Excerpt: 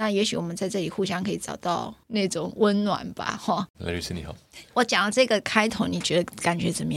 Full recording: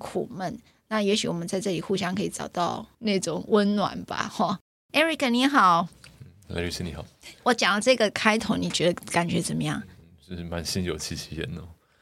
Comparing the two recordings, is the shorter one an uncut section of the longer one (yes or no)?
no